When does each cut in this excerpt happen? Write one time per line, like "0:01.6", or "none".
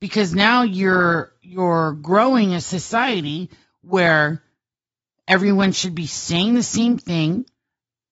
none